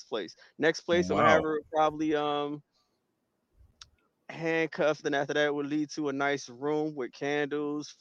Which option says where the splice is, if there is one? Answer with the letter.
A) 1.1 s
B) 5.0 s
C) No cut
B